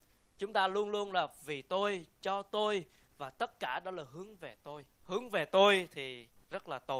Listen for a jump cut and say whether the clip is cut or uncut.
cut